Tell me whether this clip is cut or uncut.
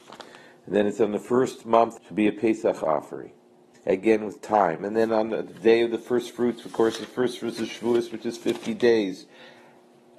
cut